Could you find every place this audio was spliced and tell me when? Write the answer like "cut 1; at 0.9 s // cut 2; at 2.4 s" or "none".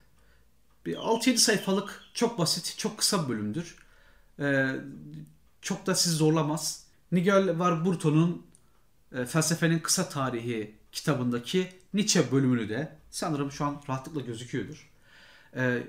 cut 1; at 6.9 s

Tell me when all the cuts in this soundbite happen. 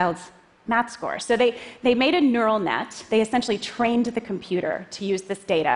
none

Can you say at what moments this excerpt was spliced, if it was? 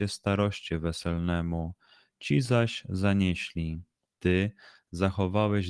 cut 1; at 4.1 s

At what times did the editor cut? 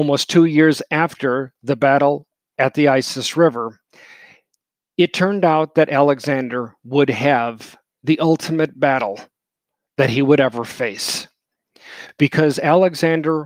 none

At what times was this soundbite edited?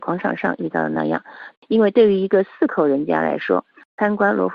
cut 1; at 1.5 s

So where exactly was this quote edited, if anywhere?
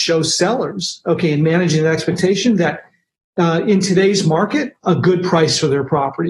cut 1; at 4.8 s

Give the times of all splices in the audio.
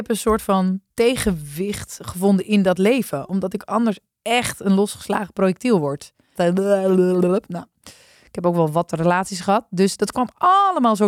cut 1; at 0.9 s // cut 2; at 6.4 s

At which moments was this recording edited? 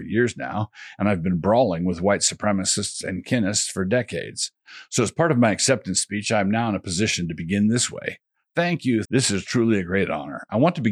cut 1; at 9.0 s

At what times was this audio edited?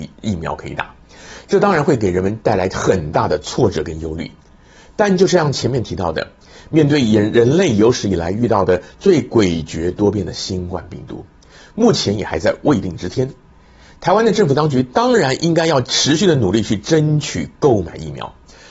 cut 1; at 11.6 s

